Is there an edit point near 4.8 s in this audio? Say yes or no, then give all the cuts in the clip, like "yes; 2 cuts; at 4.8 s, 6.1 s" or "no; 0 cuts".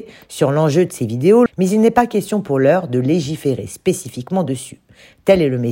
no; 1 cut; at 1.5 s